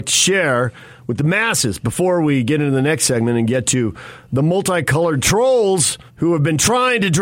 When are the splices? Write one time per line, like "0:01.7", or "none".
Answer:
0:06.1

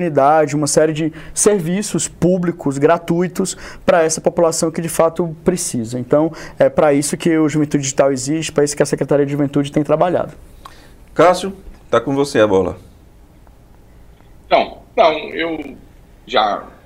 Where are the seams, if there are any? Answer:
none

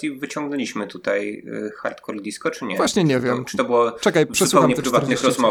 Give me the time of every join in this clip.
none

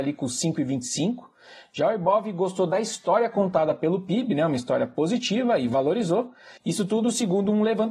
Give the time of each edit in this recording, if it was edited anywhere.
0:06.6

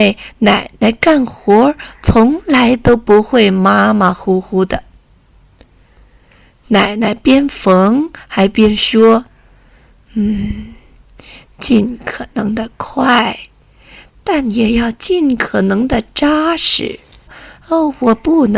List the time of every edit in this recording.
0:17.3

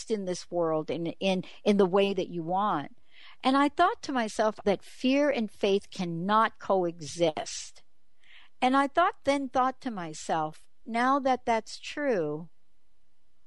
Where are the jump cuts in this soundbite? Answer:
0:04.6
0:10.8

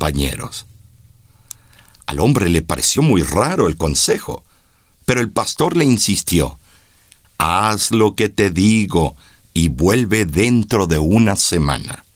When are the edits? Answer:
none

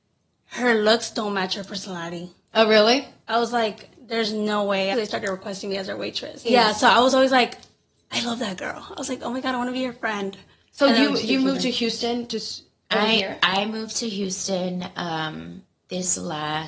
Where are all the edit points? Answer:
0:04.9
0:06.4

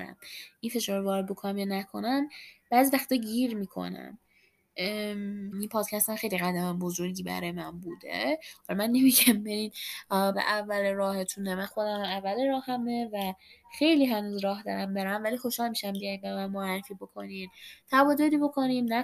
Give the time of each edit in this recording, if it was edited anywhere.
0:05.5
0:10.3

